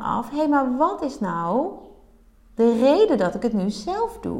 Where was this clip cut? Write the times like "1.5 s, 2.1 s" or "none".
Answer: 2.6 s

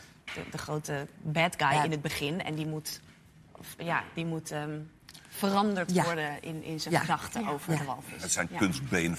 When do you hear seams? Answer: none

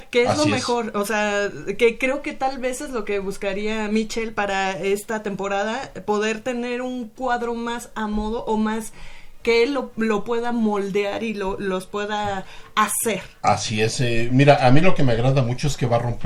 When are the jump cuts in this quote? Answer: none

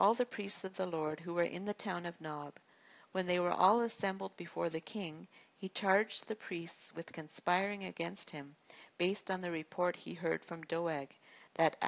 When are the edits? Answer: none

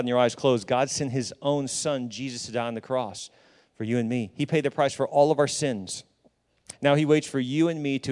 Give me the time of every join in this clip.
6.7 s

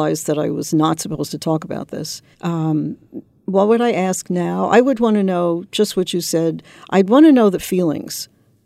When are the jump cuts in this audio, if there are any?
2.3 s

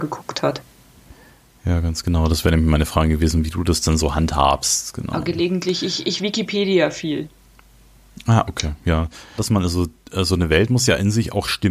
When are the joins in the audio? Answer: 9.4 s

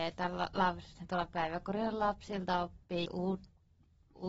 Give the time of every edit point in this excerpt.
3.1 s

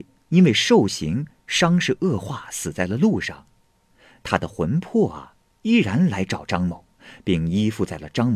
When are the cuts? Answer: none

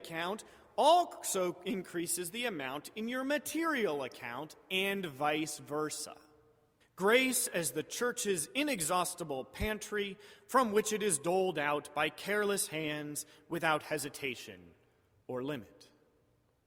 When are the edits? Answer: 6.8 s

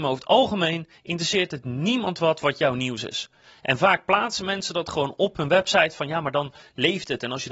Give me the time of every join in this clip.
none

